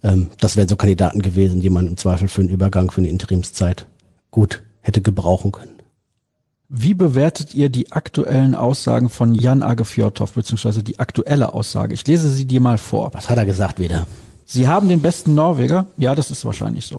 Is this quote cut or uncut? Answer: uncut